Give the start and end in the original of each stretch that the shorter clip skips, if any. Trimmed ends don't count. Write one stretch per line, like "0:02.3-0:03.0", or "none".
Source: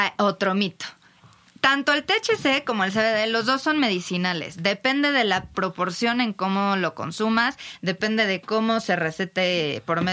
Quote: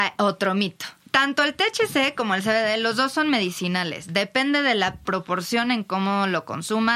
0:01.0-0:01.5

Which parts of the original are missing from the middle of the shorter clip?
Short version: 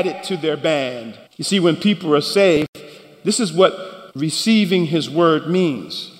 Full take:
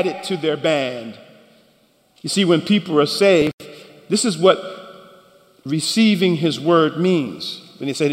0:01.3-0:02.1
0:04.9-0:05.6

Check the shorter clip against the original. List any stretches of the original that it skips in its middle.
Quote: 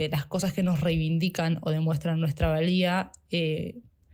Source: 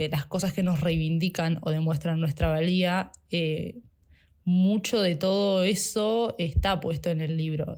none

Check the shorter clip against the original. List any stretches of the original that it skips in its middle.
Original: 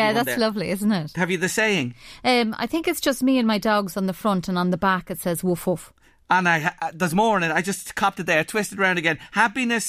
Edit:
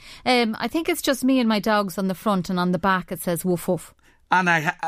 none

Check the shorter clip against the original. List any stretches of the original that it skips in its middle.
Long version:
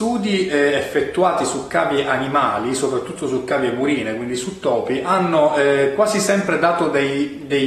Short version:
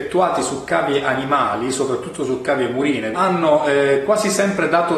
0:04.2-0:05.0

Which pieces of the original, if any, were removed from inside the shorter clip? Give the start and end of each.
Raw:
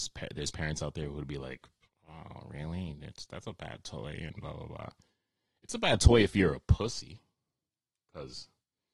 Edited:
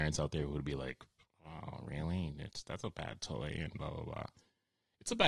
none

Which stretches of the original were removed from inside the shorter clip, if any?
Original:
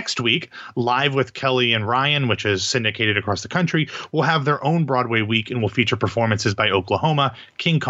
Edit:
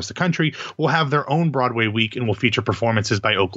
none

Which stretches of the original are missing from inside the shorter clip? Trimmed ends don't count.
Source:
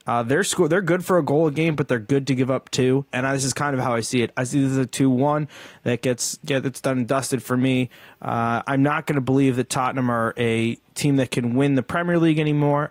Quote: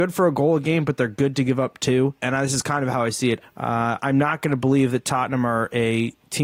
0:04.3-0:08.1

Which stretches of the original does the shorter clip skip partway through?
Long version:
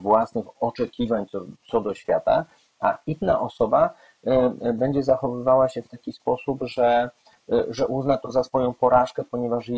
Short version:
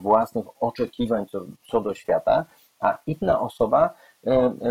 none

